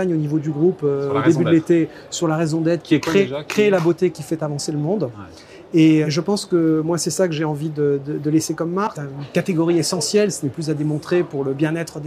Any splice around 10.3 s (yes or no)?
no